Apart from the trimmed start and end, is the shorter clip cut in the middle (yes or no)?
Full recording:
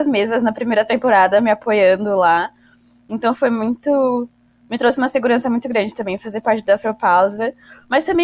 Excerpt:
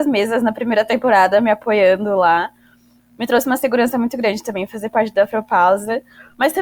yes